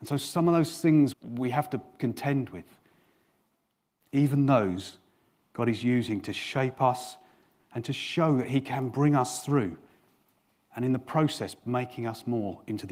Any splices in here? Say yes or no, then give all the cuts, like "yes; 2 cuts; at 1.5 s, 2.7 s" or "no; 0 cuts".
yes; 1 cut; at 1.1 s